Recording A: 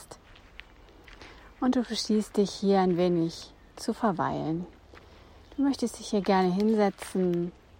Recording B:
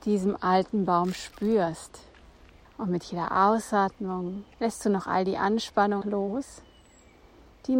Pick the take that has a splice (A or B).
B